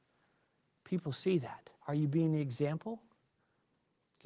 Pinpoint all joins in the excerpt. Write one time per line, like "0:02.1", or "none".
0:01.8